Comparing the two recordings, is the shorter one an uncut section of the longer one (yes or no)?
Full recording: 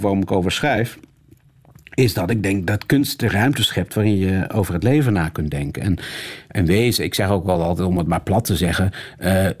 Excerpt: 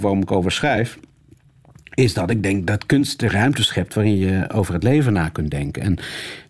yes